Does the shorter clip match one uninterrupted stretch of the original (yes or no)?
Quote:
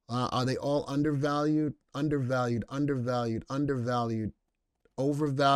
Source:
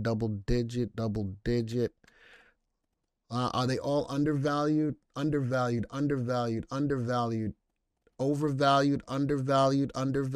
yes